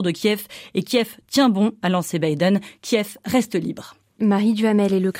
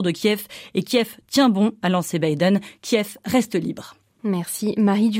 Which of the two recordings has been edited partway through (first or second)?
first